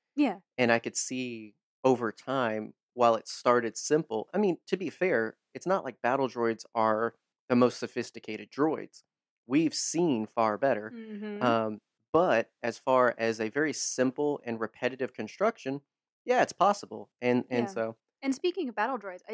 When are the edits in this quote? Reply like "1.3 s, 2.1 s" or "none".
none